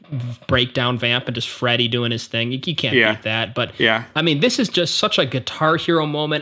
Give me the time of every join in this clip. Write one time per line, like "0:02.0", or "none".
none